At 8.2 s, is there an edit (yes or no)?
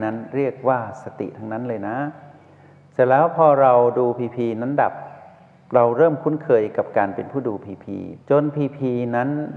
yes